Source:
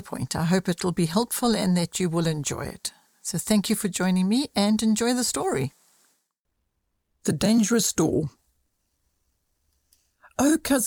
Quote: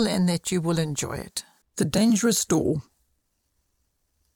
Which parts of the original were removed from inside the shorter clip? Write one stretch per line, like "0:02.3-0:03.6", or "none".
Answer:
0:03.1-0:07.1